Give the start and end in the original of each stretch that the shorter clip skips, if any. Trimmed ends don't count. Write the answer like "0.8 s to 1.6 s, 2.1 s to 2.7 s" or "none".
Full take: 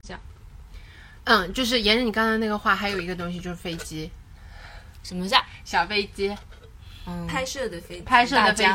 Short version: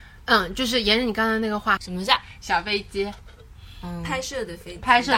2.8 s to 5.0 s